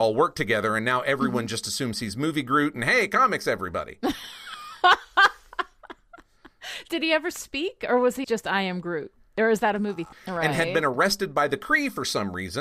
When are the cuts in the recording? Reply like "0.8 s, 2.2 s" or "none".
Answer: 8.2 s, 10.1 s